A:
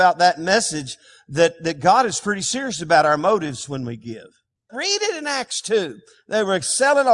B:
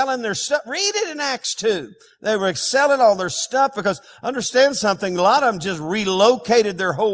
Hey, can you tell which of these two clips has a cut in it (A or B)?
A